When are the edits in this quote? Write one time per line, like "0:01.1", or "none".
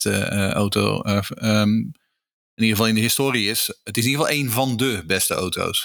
none